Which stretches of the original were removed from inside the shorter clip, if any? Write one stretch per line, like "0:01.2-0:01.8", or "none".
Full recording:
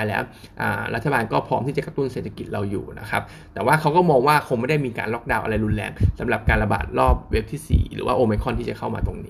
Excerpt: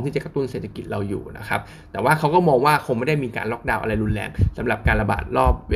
none